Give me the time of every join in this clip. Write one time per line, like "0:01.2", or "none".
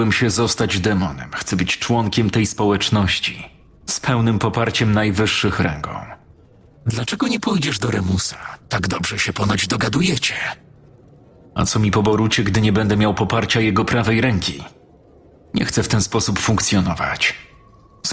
0:06.7
0:08.6